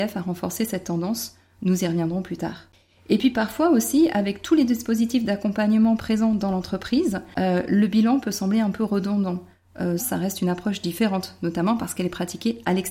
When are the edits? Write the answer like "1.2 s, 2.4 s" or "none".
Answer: 10.0 s